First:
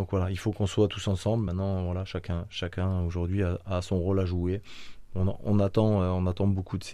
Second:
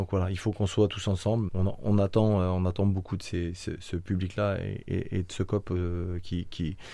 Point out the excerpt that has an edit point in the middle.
second; 1 cut; at 1.5 s

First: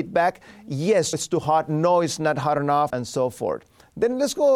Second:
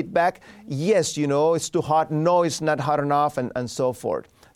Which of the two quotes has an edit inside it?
first; 2 cuts; at 1.1 s, 2.9 s

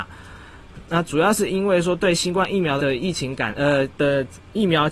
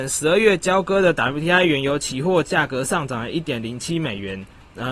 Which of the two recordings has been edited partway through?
first; 1 cut; at 2.8 s

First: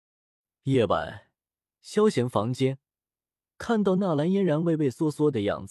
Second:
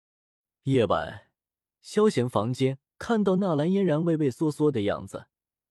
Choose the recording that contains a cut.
second; 1 cut; at 2.9 s

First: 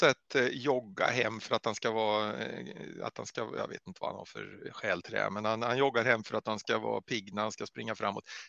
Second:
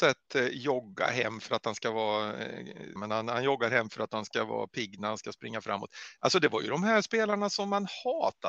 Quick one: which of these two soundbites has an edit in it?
second; 1 cut; at 3.0 s

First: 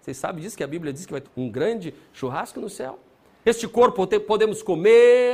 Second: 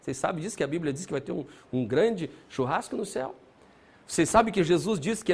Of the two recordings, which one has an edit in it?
first; 2 cuts; at 1.2 s, 3.4 s

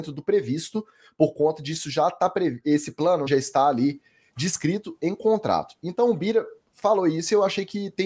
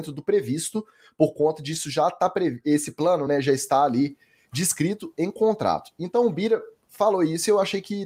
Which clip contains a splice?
first; 1 cut; at 3.3 s

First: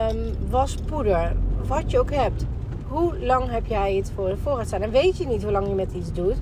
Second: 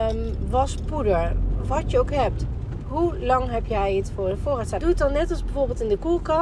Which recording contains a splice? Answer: second; 1 cut; at 4.8 s

